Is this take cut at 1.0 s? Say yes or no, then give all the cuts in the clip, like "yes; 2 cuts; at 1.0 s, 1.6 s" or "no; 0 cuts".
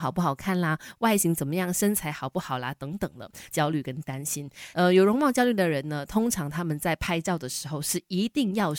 no; 2 cuts; at 3.5 s, 4.7 s